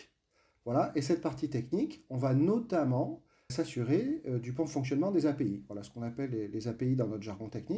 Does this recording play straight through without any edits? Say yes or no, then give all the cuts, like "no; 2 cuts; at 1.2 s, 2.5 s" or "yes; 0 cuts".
no; 1 cut; at 3.5 s